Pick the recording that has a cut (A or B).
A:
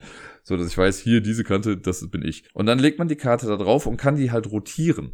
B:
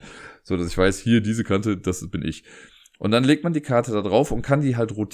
A